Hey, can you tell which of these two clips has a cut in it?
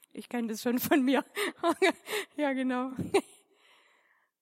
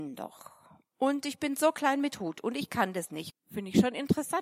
second; 1 cut; at 3.3 s

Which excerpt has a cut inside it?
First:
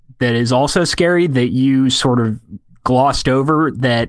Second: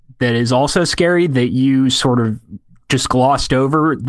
first; 1 cut; at 2.8 s

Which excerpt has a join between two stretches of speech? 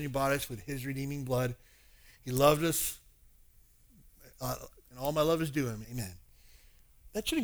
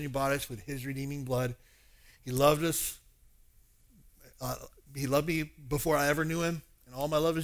first; 2 cuts; at 4.8 s, 5.8 s

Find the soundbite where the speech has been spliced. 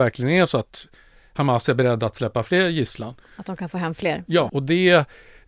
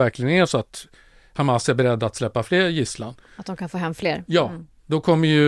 first; 1 cut; at 4.5 s

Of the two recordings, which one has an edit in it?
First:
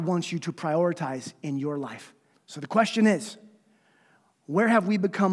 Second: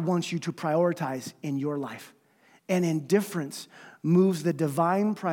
first; 1 cut; at 2.3 s

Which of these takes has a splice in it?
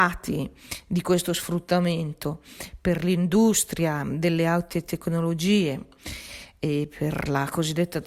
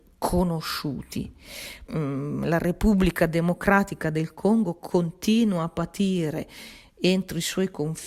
second; 1 cut; at 1.9 s

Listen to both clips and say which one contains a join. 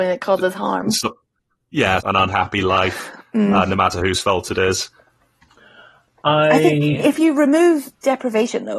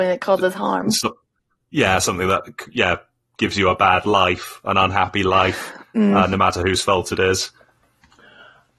first; 1 cut; at 2.0 s

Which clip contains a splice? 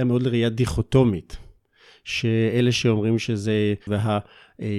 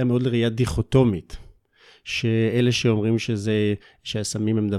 first; 1 cut; at 3.9 s

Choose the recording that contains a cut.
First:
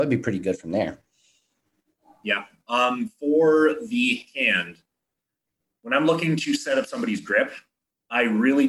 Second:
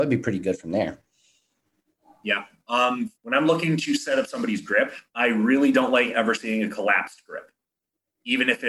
second; 2 cuts; at 3.1 s, 5.1 s

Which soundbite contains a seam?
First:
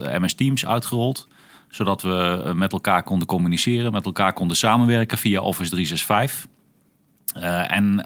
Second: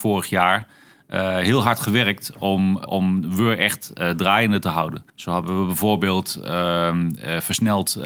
second; 2 cuts; at 2.9 s, 5.1 s

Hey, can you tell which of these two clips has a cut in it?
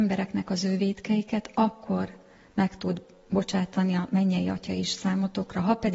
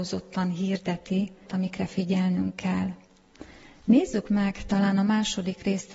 second; 1 cut; at 1.5 s

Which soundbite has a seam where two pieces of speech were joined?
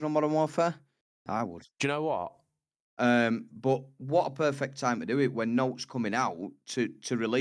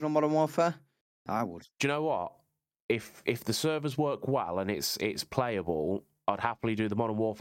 first; 1 cut; at 2.8 s

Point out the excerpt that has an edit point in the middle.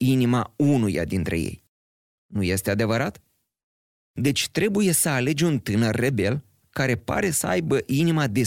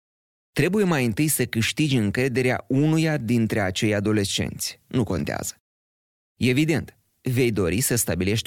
second; 1 cut; at 4.8 s

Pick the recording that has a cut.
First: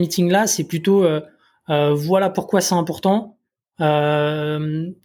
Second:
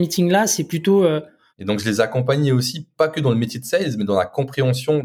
second; 1 cut; at 1.5 s

